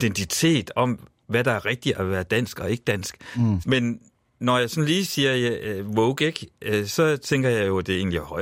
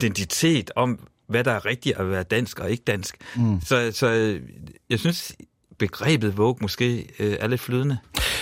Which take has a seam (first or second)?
first